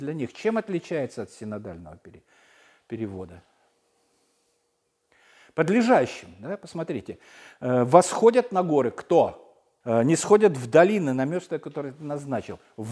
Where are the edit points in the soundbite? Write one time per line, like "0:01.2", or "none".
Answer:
0:09.8